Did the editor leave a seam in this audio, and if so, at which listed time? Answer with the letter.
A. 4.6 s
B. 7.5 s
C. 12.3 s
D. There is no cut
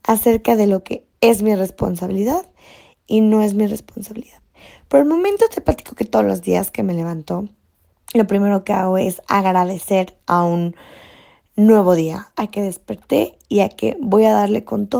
C